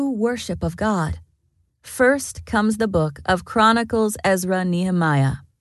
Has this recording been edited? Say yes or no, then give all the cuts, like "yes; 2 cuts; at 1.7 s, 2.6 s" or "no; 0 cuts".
yes; 1 cut; at 1.7 s